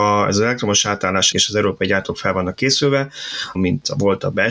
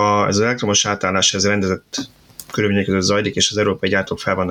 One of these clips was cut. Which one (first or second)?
first